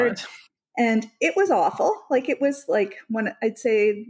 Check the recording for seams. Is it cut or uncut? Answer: uncut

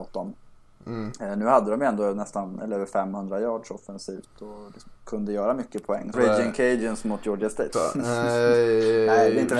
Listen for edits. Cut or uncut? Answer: cut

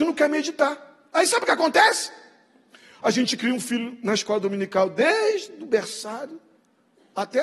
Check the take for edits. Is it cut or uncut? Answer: uncut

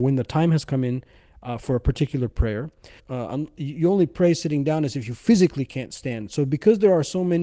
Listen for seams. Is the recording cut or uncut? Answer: cut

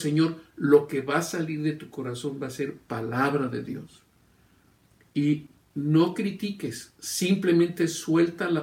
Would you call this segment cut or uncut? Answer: uncut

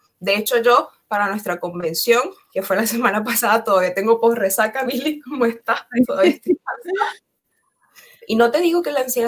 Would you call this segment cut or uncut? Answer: cut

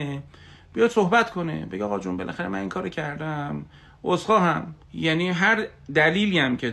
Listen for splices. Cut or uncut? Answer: cut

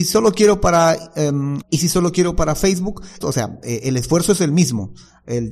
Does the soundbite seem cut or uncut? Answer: cut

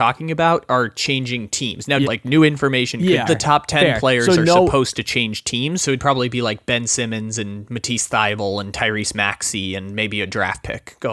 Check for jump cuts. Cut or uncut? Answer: cut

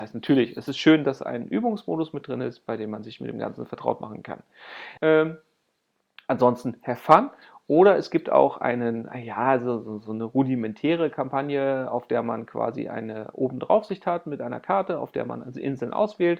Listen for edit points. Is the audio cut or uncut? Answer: cut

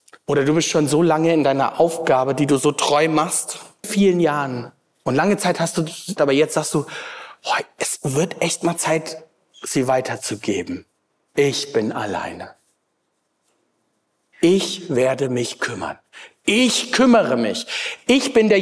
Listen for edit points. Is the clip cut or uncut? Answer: cut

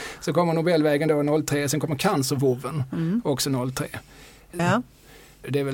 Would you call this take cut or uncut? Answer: cut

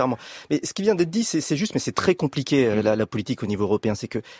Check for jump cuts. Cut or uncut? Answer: uncut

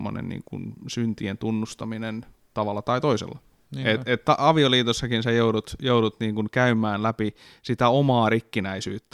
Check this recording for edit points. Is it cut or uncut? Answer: cut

